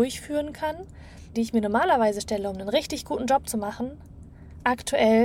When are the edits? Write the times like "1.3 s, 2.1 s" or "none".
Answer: 1.3 s